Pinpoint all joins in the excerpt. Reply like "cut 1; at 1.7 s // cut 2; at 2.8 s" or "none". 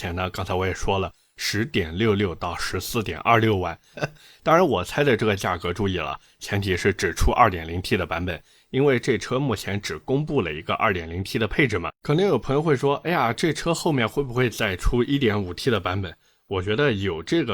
cut 1; at 3.9 s // cut 2; at 12.0 s